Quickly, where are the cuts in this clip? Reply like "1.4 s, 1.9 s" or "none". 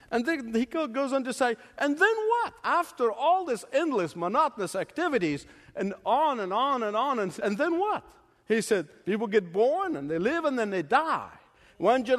9.0 s